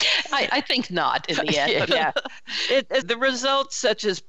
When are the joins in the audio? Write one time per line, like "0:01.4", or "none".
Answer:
0:01.9
0:03.0